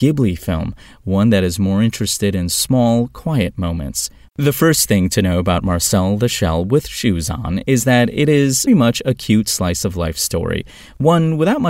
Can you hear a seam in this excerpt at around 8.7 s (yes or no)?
yes